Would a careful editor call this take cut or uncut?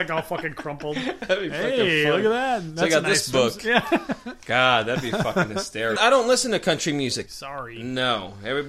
cut